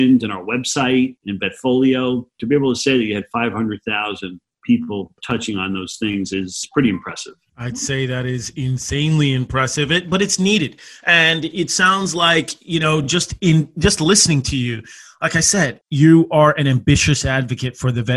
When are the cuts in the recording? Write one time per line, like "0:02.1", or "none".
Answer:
none